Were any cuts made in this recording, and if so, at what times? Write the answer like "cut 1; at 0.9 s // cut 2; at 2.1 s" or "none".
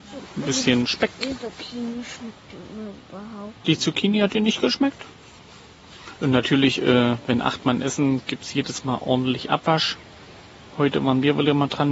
cut 1; at 6.2 s